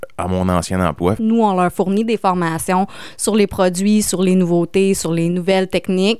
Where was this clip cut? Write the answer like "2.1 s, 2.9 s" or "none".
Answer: 1.2 s